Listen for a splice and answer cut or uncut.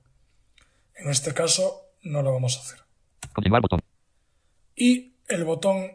uncut